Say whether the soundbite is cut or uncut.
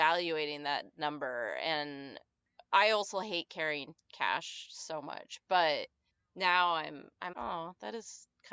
cut